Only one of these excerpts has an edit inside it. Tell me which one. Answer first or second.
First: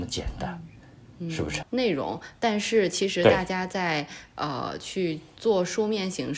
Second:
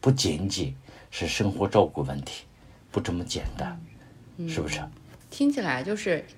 first